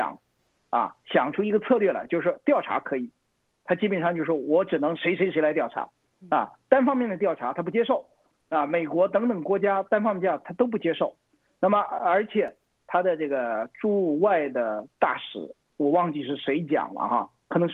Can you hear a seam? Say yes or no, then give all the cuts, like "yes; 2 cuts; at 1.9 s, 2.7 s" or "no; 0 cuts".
no; 0 cuts